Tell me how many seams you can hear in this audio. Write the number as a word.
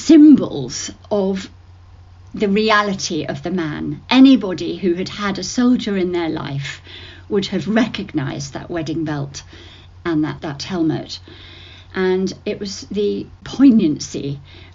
one